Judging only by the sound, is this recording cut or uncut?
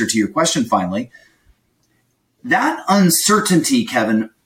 uncut